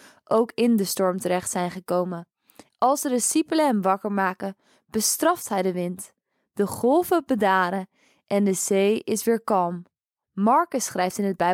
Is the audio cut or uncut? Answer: cut